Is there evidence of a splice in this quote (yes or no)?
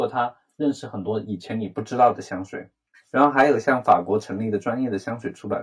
yes